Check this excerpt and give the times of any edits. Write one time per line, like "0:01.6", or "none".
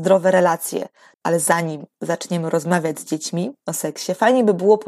0:01.1